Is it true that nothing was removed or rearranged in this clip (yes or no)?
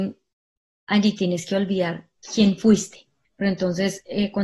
no